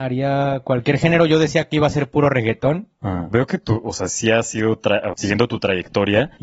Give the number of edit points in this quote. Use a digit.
2